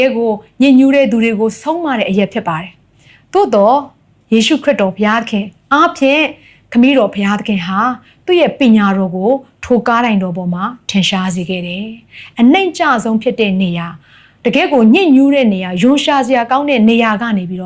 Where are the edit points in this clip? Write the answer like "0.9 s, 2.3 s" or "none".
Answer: none